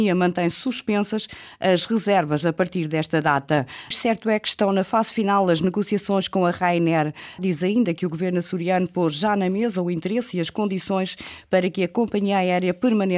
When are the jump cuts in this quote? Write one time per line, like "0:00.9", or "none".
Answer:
0:03.9
0:07.4